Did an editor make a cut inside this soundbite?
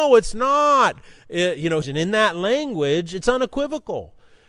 yes; 1 cut; at 1.8 s

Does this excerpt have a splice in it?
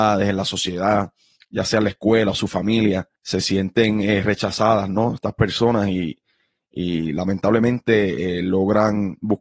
yes; 1 cut; at 3.2 s

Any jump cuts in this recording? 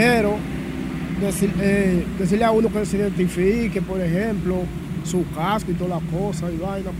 no; 0 cuts

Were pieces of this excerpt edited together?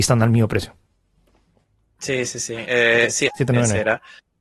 yes; 1 cut; at 3.3 s

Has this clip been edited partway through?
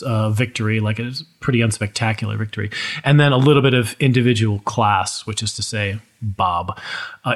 no; 0 cuts

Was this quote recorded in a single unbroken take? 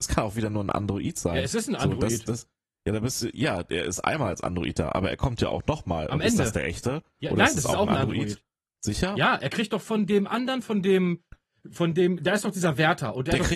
yes; 0 cuts

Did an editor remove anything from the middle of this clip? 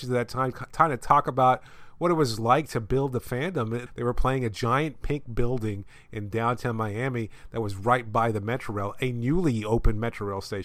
yes; 1 cut; at 3.9 s

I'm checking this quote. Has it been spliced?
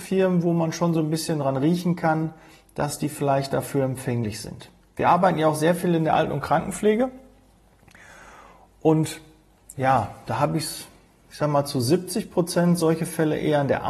no; 0 cuts

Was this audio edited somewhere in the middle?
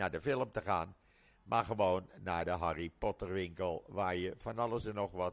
no; 0 cuts

